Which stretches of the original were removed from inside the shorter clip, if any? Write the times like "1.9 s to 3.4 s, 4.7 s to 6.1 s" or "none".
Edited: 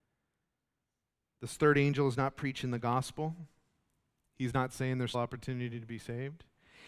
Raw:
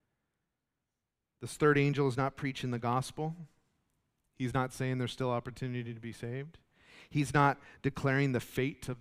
5.1 s to 5.3 s